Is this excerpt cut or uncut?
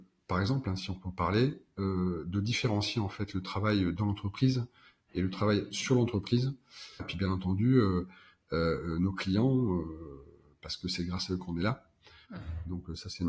cut